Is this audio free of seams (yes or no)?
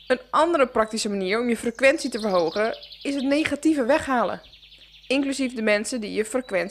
no